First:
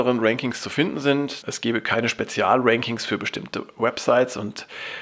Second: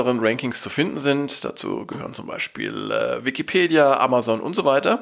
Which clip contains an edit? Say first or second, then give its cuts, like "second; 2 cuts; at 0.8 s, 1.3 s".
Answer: first; 1 cut; at 1.4 s